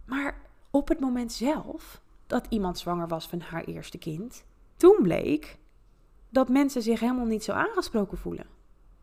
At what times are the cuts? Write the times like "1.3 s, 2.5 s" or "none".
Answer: 4.8 s